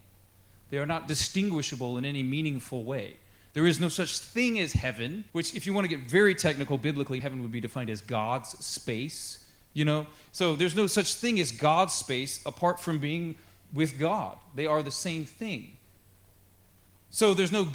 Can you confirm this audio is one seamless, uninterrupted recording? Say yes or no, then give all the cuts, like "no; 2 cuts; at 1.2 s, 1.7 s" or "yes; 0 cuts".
no; 2 cuts; at 5.3 s, 7.2 s